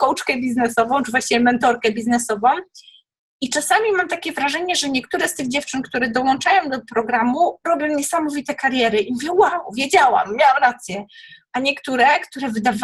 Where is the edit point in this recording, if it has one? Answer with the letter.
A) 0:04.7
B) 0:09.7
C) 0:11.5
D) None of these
D